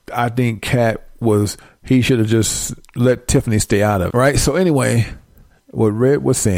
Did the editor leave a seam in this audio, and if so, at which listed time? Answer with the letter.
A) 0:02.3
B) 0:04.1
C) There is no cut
B